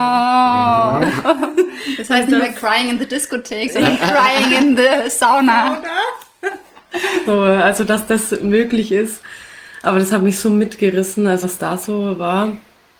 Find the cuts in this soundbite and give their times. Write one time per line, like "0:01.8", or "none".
0:07.3
0:11.4